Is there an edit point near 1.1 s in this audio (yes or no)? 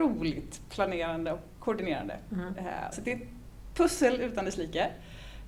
no